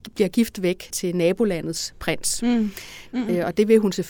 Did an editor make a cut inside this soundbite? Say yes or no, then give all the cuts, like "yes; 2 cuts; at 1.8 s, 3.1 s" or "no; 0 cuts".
yes; 2 cuts; at 0.9 s, 3.1 s